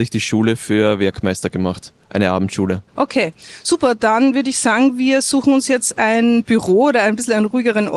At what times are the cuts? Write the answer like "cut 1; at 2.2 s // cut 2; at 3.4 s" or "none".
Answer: cut 1; at 2.9 s